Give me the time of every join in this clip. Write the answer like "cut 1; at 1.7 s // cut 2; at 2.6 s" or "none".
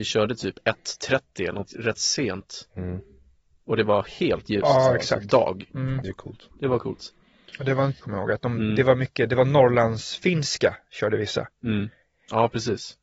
cut 1; at 8.0 s